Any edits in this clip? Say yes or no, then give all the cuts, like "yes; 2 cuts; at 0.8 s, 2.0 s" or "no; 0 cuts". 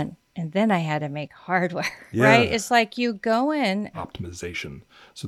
yes; 2 cuts; at 2.1 s, 3.9 s